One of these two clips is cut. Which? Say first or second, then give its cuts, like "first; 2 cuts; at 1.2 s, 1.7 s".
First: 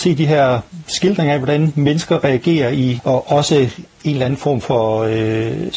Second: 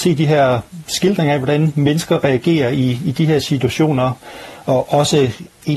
first; 1 cut; at 3.0 s